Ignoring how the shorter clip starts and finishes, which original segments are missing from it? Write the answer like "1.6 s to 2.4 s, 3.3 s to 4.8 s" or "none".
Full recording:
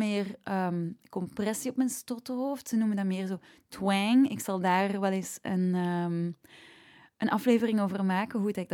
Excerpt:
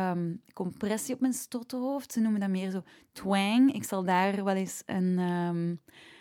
none